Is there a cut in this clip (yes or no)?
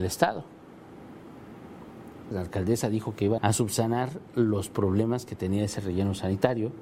yes